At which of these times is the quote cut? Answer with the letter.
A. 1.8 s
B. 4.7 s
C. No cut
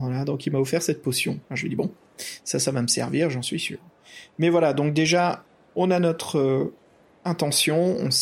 C